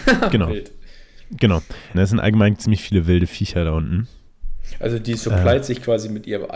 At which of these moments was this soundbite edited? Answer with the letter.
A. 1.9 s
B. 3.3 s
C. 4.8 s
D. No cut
A